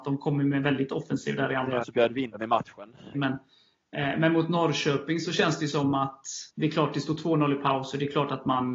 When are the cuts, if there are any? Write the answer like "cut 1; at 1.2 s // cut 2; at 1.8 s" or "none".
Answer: cut 1; at 1.8 s // cut 2; at 3.1 s // cut 3; at 6.5 s